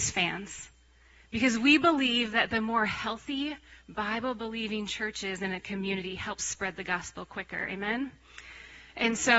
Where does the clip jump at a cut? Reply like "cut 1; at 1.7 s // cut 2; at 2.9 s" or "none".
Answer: none